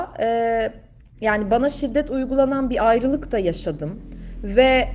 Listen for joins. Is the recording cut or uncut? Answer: uncut